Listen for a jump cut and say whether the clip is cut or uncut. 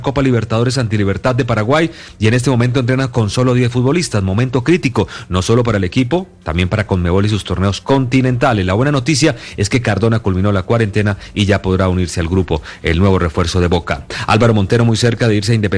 uncut